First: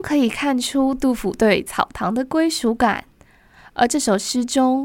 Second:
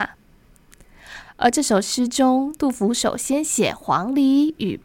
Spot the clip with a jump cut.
second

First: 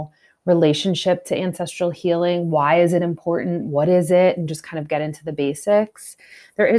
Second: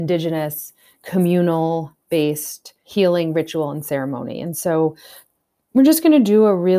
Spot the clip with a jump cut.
second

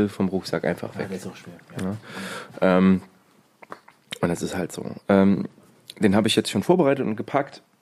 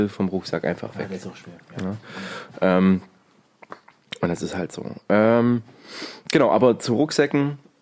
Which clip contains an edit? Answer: first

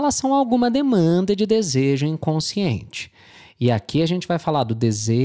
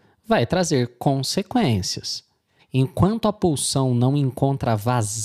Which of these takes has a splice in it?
second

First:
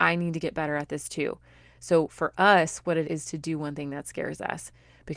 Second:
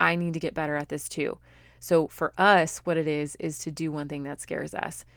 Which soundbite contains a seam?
first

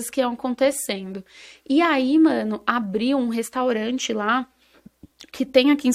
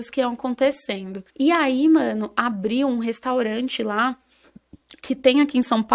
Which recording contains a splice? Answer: second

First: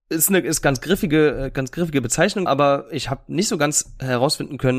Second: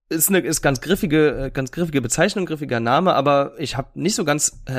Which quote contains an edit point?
first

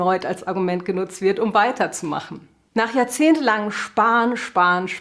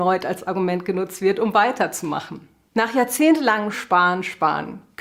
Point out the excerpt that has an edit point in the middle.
second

